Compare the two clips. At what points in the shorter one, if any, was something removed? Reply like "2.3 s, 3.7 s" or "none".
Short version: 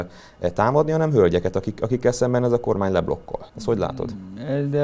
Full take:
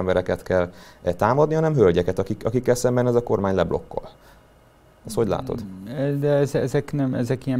3.5 s